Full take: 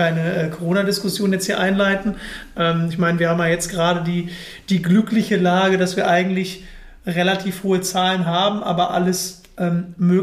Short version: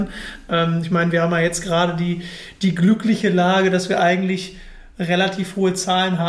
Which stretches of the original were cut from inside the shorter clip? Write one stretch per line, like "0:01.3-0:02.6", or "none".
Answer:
none

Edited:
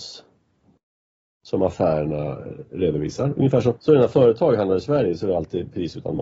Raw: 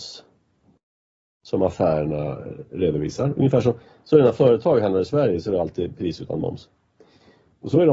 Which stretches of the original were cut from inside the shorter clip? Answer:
0:03.7-0:04.0

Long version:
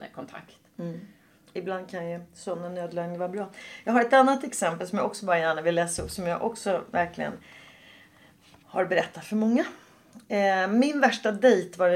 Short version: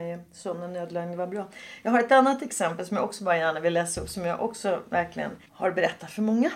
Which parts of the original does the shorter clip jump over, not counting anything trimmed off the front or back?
0:07.5-0:08.6

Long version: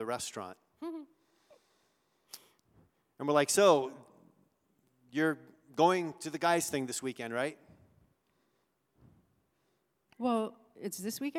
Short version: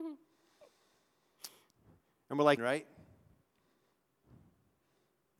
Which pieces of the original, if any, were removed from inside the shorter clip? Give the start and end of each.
0:03.5-0:07.3

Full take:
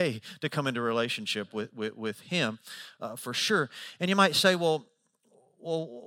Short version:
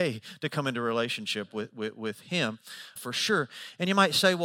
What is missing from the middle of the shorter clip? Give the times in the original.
0:03.0-0:03.2

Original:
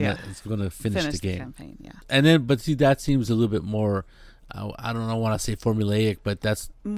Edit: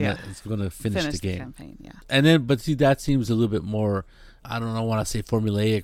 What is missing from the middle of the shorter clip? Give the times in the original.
0:04.4-0:04.8

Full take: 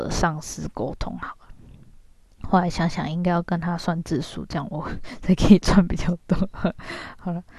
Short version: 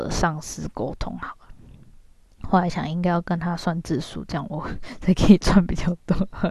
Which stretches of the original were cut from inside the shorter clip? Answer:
0:02.7-0:02.9

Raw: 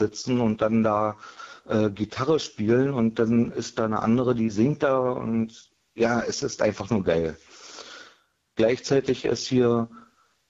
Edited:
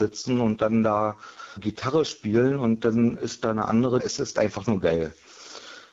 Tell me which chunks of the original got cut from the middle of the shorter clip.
0:01.6-0:01.9
0:04.3-0:06.2

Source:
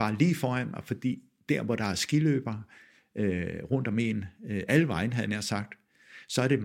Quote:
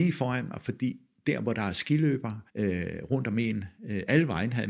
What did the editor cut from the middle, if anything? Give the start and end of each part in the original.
0:02.7-0:03.1

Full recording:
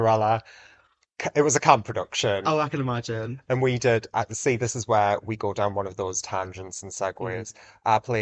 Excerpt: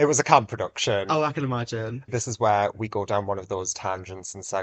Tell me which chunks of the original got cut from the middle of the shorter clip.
0:03.4-0:04.6

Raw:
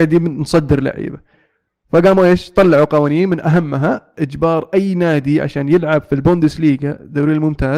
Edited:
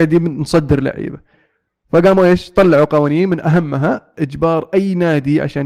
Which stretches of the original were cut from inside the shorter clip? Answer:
none

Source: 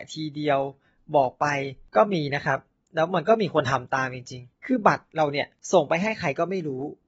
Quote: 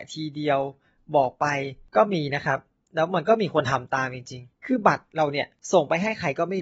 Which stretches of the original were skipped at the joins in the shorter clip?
none

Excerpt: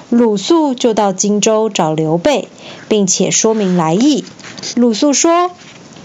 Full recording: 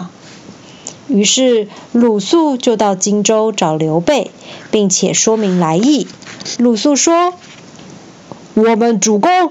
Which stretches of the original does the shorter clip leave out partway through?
none

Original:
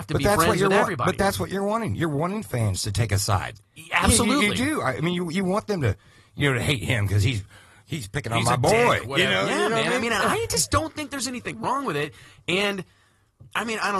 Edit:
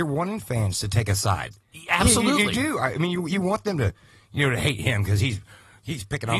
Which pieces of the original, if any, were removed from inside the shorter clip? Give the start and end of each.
none

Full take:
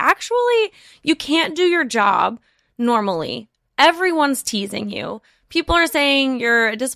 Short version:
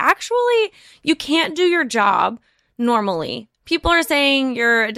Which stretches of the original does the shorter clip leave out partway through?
0:03.6-0:05.4

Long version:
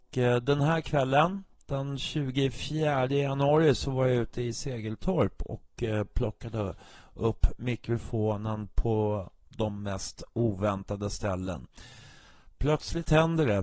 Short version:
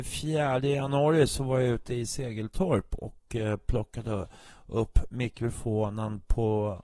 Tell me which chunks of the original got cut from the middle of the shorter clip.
none

